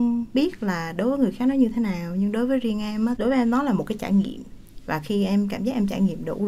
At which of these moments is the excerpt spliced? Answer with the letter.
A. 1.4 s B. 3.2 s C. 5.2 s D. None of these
B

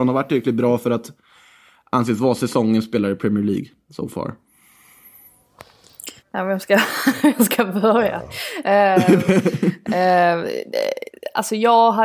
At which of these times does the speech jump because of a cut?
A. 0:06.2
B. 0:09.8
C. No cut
A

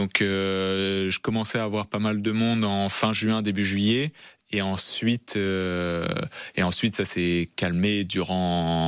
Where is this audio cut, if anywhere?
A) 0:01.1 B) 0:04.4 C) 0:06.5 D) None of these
D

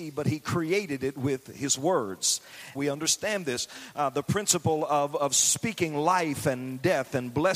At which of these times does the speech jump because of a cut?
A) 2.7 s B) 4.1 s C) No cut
A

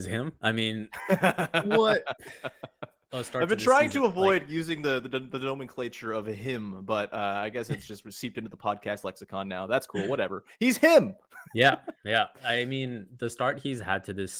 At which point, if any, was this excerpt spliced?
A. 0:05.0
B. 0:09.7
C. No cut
C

